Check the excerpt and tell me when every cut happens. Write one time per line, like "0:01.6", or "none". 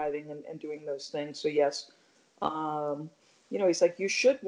none

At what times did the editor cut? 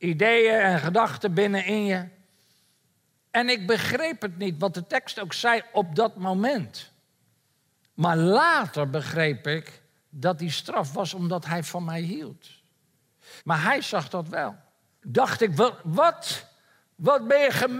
0:13.4
0:15.0

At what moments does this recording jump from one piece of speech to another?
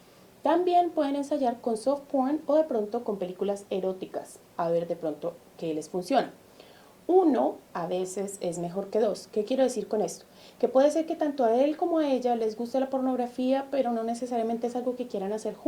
none

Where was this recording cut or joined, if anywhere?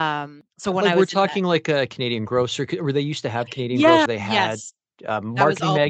0:04.1

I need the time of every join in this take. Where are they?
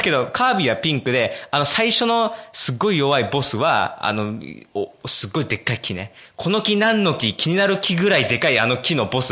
none

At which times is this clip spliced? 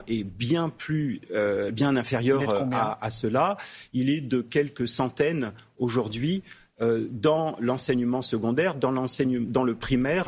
none

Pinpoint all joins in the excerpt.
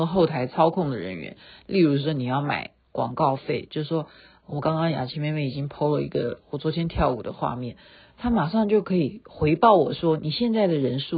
none

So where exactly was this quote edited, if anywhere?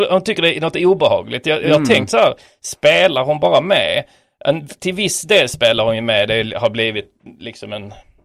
none

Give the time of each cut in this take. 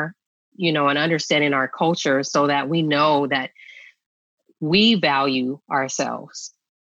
none

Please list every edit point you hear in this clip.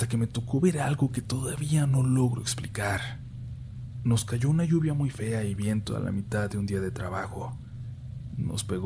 none

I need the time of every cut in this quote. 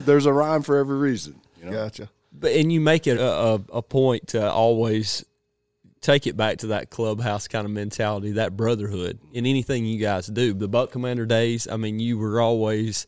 0:03.1

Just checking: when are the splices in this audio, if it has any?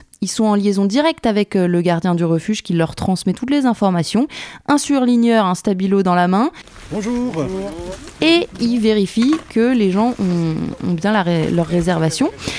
0:08.2

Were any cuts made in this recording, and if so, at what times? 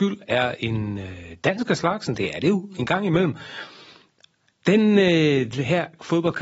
none

